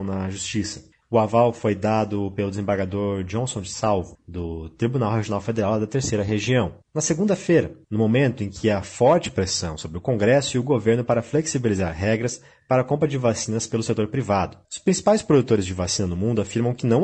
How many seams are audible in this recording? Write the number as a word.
one